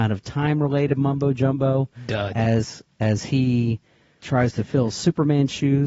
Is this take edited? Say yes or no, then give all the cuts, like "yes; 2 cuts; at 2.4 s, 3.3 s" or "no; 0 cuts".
yes; 1 cut; at 4.2 s